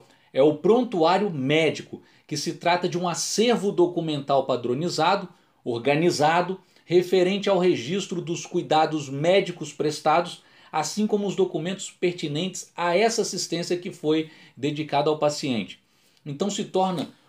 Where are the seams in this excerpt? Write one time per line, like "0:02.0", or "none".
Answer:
none